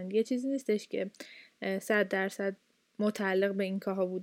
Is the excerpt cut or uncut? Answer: uncut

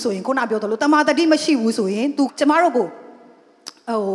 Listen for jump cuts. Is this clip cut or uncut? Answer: cut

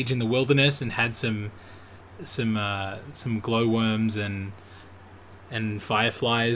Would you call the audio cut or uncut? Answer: uncut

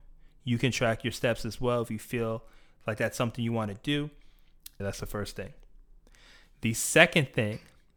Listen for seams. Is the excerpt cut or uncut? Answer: cut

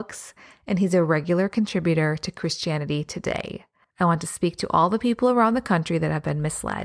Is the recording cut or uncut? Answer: cut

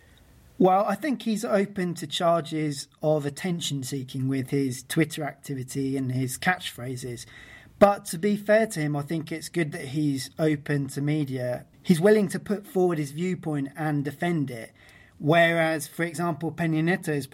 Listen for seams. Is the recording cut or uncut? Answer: uncut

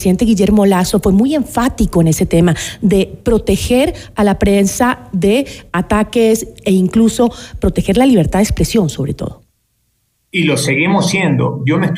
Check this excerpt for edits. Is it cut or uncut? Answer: uncut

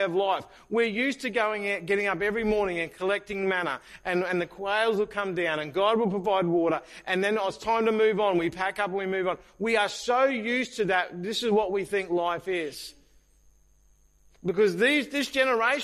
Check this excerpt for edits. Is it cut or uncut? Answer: uncut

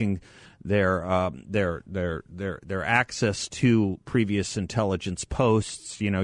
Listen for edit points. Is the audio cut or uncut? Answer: uncut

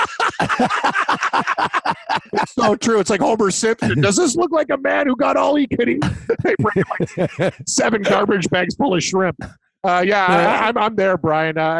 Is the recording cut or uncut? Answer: uncut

